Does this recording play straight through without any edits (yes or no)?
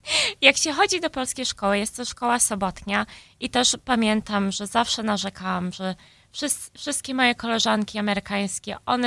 yes